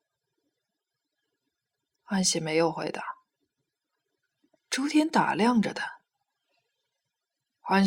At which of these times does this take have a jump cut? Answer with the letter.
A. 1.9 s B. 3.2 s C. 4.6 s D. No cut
C